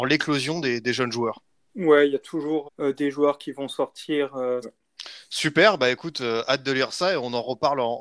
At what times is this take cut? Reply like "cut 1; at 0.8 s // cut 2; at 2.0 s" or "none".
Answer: cut 1; at 2.6 s // cut 2; at 4.6 s